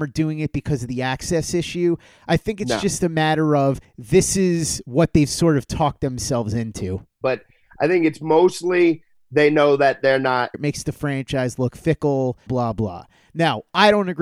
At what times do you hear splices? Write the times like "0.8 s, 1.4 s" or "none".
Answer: 7.2 s, 10.5 s, 12.5 s

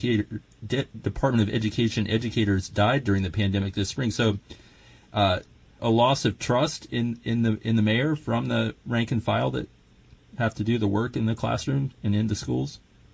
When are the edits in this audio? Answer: 5.8 s, 6.9 s

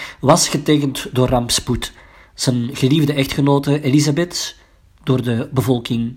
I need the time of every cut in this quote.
none

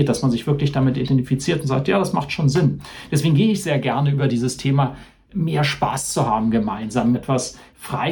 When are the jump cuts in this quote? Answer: 7.1 s

